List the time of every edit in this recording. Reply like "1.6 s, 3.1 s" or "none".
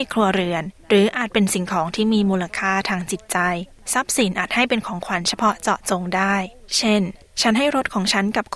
none